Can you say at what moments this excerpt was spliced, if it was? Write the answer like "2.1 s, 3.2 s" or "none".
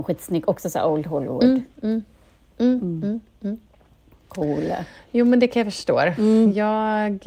none